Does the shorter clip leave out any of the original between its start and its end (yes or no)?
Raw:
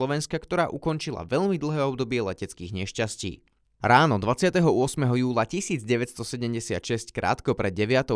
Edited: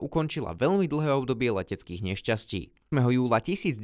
yes